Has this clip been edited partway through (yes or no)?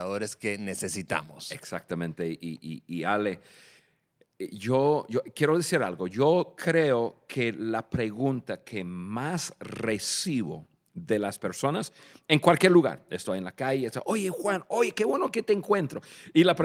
no